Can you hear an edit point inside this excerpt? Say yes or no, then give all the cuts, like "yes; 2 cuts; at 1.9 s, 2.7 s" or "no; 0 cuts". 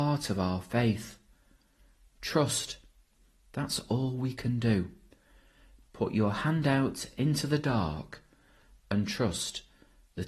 no; 0 cuts